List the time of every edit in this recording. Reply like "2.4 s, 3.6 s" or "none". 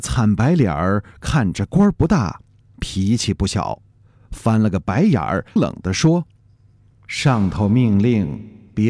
5.6 s